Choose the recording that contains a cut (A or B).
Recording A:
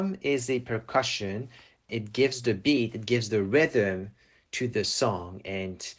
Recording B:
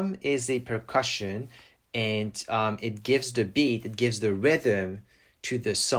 A